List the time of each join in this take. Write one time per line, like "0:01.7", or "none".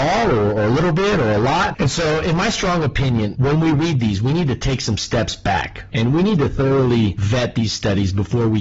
0:03.4